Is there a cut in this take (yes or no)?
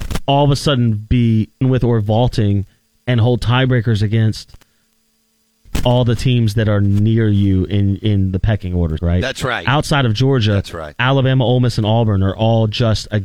yes